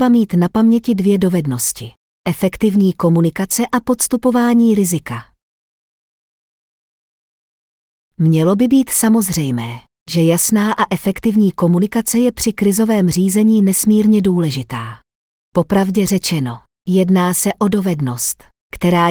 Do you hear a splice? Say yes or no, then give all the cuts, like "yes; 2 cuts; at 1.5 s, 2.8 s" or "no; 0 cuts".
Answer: no; 0 cuts